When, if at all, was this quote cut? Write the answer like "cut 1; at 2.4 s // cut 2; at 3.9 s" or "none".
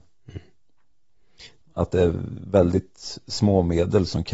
cut 1; at 1.6 s